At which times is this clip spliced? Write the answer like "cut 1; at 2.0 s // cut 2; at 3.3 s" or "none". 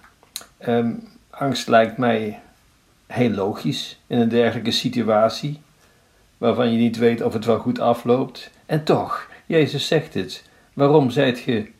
none